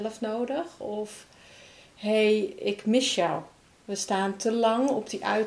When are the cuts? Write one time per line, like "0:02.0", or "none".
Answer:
none